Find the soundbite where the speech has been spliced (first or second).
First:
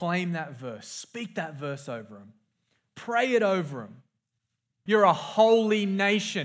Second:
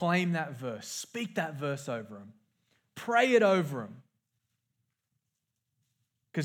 first